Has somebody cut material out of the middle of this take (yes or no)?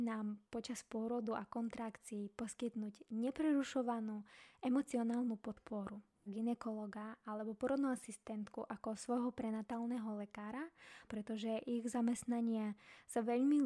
yes